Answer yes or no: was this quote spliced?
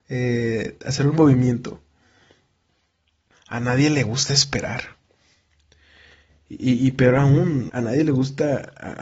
yes